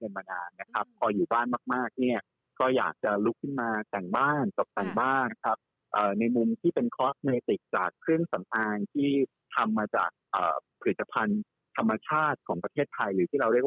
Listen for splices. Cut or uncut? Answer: cut